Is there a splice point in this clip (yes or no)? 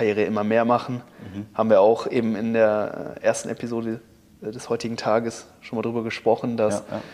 no